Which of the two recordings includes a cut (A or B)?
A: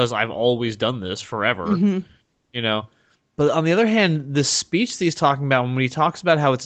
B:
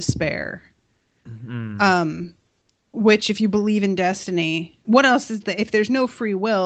B